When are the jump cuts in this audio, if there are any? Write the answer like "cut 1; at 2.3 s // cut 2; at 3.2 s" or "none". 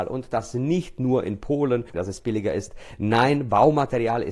cut 1; at 1.9 s